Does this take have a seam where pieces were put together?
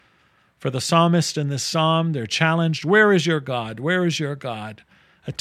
no; 0 cuts

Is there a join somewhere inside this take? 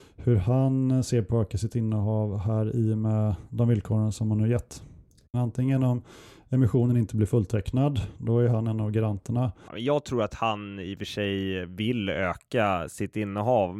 yes; 2 cuts; at 5.3 s, 9.7 s

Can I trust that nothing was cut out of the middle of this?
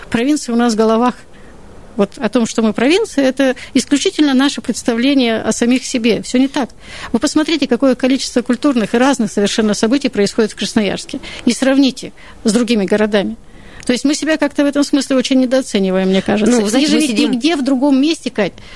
yes; 0 cuts

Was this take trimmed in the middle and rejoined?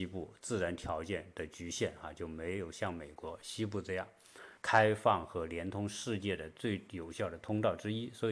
yes; 1 cut; at 4.6 s

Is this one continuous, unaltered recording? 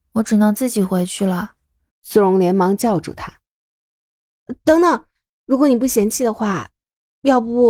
no; 2 cuts; at 1.9 s, 5.3 s

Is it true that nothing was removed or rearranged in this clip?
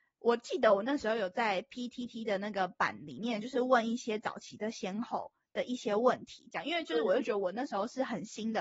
yes; 0 cuts

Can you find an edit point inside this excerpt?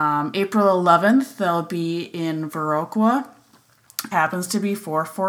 yes; 1 cut; at 4.1 s

